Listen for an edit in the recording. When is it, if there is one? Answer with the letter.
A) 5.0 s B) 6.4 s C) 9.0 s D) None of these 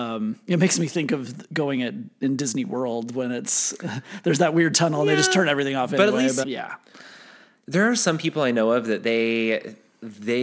B